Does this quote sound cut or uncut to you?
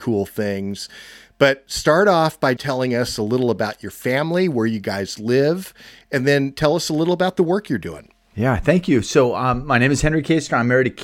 cut